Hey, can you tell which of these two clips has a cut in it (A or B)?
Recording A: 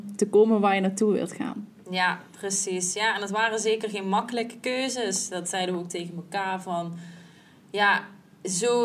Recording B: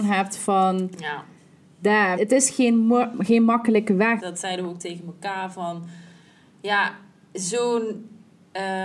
B